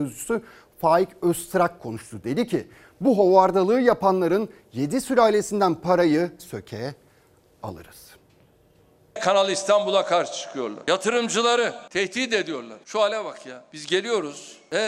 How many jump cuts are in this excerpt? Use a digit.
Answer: 1